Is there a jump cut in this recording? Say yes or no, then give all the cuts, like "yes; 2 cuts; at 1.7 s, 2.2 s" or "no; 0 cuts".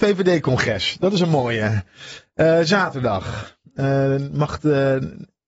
no; 0 cuts